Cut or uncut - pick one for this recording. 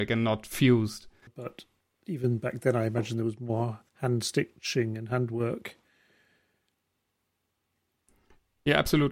cut